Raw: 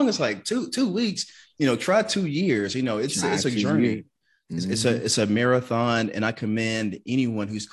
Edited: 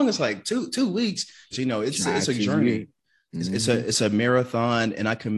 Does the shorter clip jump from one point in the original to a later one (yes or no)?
yes